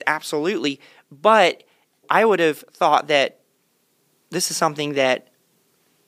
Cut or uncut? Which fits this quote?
cut